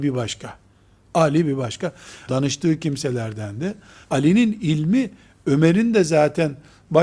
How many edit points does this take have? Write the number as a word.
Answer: two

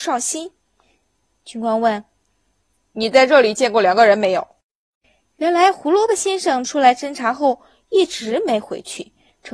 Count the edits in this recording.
one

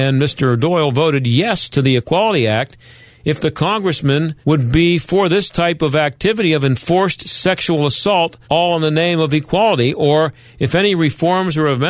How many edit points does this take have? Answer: two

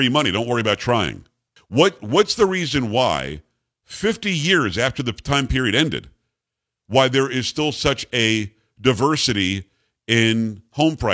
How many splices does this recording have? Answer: one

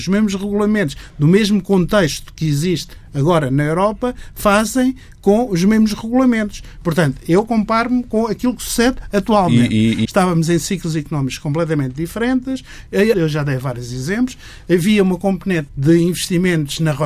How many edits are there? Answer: three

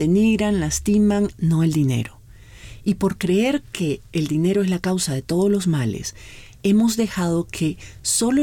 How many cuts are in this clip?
one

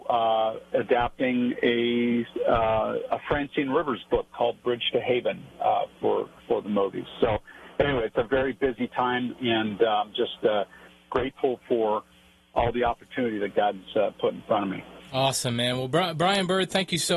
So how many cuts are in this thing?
zero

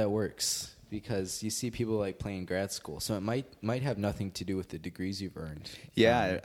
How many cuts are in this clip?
zero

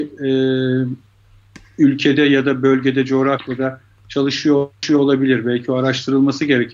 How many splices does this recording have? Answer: zero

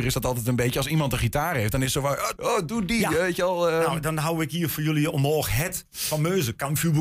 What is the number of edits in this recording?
one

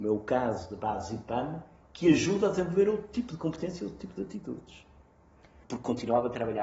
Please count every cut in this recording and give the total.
one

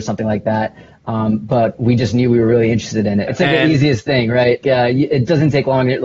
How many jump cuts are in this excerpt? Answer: two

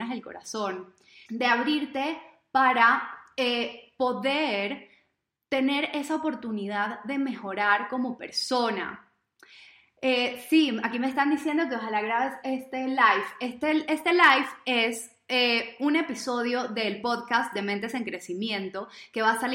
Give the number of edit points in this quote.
one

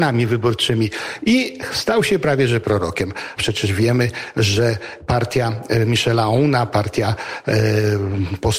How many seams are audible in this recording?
one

